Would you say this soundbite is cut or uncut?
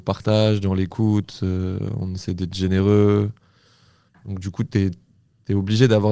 cut